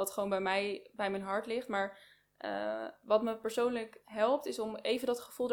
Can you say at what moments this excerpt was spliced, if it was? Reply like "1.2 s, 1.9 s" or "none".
none

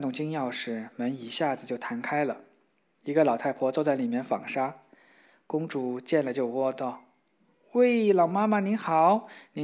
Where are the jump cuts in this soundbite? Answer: none

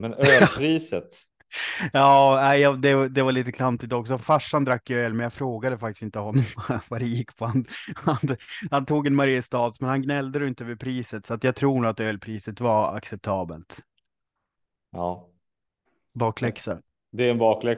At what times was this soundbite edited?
none

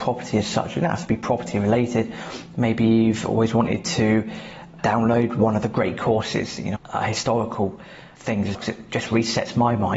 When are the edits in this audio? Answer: 4.8 s, 6.8 s, 8.5 s

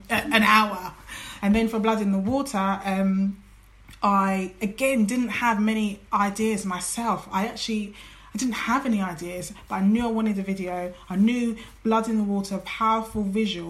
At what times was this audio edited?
1.4 s

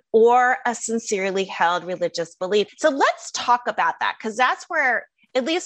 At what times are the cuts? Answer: 2.7 s

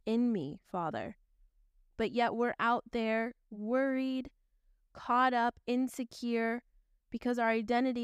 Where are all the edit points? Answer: none

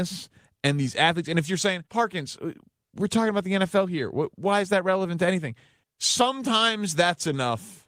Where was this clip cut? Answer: 1.9 s, 5.8 s

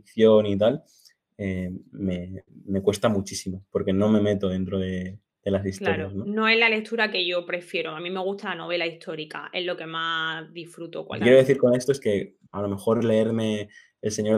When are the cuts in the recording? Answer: 11.2 s, 12.5 s

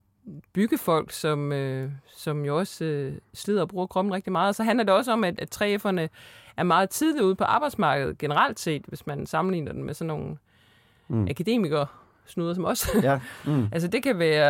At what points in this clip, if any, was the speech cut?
5.4 s, 13.4 s

